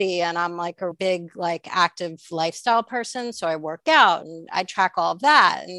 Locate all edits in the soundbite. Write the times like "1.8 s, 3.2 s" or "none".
0.9 s